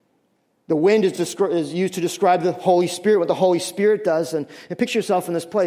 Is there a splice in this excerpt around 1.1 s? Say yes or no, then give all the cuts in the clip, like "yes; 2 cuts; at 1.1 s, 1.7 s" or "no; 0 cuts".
no; 0 cuts